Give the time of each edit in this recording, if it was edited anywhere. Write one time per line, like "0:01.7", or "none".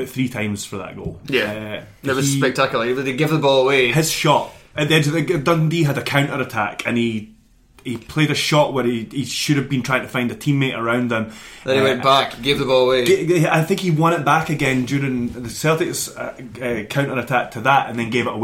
none